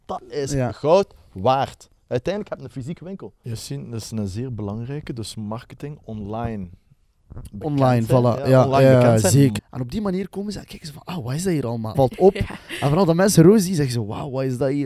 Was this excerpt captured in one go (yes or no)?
no